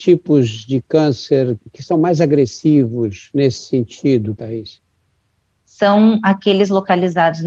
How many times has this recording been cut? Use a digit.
1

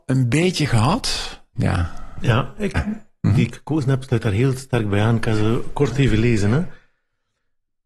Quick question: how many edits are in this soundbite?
2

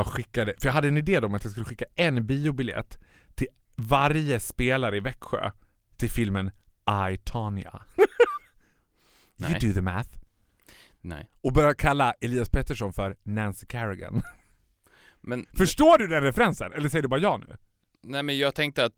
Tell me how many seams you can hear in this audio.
0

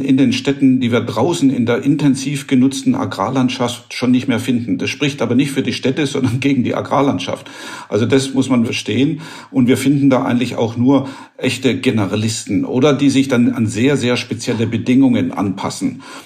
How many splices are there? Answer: 1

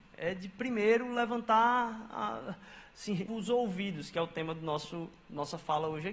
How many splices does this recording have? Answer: 1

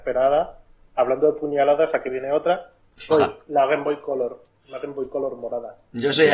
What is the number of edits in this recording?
1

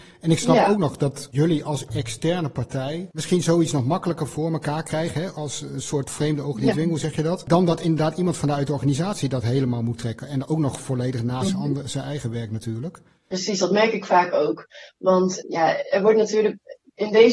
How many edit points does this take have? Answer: 1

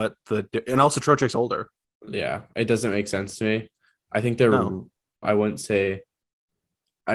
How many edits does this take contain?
1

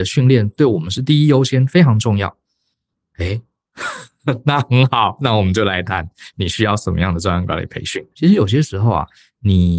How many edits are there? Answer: 1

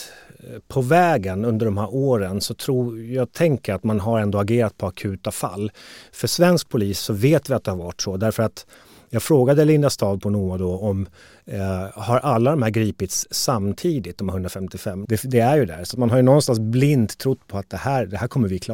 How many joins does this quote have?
1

